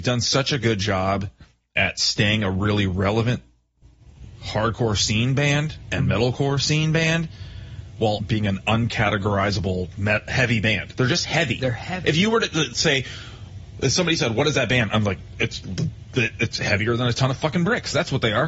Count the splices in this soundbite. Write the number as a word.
one